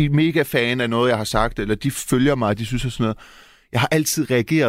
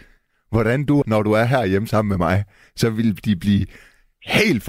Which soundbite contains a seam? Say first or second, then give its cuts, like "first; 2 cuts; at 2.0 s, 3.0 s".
second; 1 cut; at 1.0 s